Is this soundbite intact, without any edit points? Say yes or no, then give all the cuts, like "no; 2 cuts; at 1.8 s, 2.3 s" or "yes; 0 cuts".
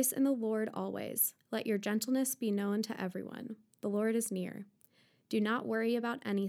no; 1 cut; at 1.4 s